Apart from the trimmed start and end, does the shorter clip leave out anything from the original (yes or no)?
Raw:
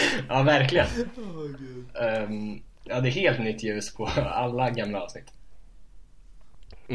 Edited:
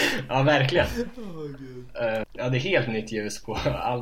yes